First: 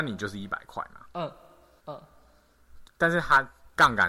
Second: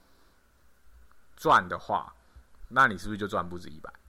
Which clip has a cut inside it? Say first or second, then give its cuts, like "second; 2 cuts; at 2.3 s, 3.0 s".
first; 2 cuts; at 1.8 s, 2.9 s